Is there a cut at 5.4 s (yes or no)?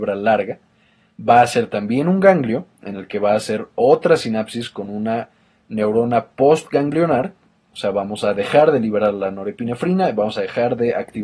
no